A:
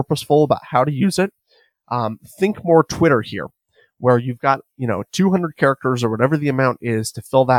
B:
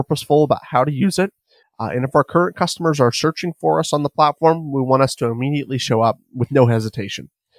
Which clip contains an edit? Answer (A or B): B